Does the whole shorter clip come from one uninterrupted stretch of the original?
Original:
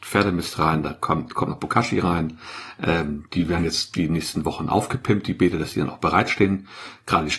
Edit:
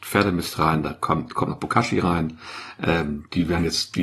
yes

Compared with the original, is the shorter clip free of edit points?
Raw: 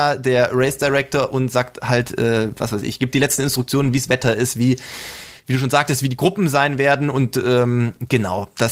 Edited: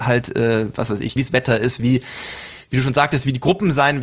no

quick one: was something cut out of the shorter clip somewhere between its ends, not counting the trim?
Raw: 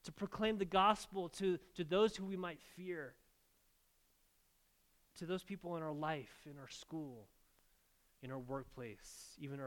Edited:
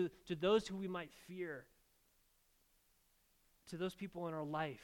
no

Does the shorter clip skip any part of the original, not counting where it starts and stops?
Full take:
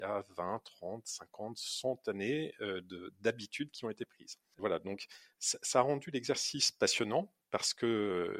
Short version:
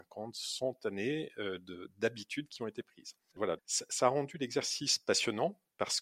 yes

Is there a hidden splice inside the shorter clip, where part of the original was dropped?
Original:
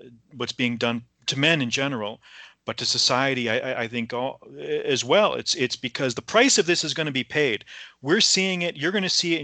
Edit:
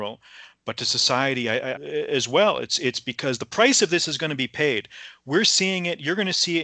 yes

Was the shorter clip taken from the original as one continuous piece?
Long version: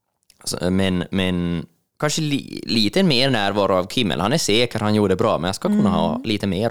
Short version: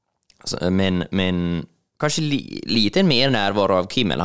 yes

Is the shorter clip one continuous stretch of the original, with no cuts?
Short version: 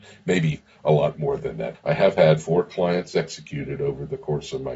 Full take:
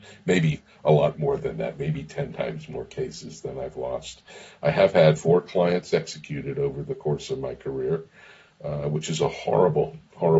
no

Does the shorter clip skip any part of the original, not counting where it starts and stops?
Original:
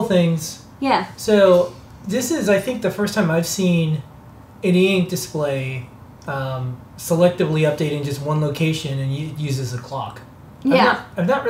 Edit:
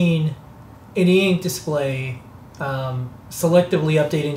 no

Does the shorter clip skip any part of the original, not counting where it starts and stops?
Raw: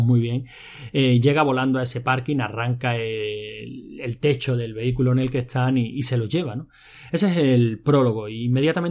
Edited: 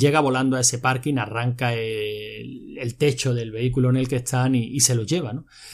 no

